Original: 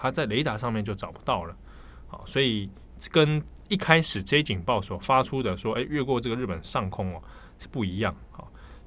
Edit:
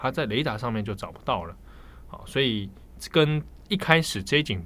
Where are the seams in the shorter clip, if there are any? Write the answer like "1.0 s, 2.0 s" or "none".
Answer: none